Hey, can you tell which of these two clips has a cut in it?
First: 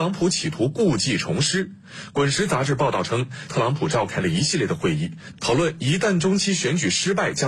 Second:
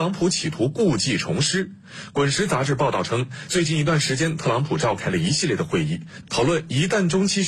first; 1 cut; at 3.5 s

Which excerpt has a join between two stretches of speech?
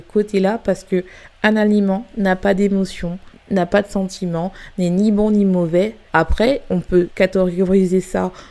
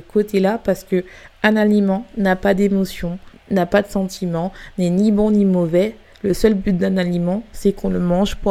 first; 2 cuts; at 6.1 s, 7.1 s

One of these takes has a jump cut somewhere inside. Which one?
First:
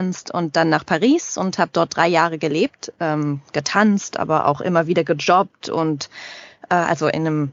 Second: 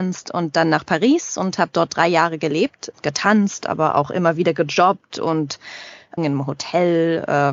second; 2 cuts; at 2.9 s, 6.2 s

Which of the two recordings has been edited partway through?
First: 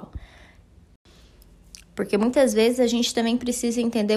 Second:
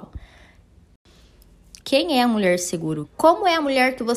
second; 2 cuts; at 1.8 s, 3.0 s

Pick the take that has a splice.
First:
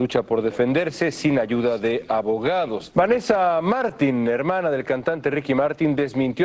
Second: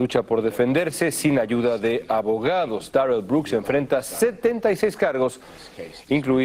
first; 1 cut; at 2.9 s

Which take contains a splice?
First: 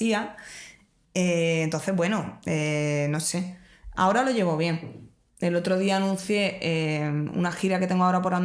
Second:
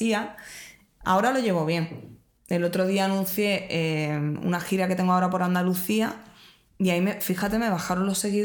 second; 1 cut; at 1.0 s

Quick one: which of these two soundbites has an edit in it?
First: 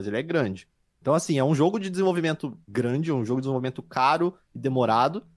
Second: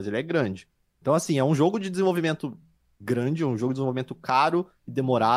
first; 1 cut; at 2.6 s

